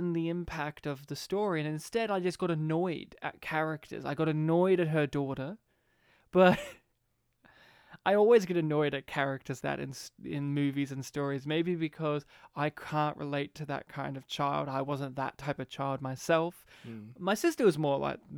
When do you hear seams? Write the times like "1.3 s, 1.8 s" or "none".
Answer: 9.6 s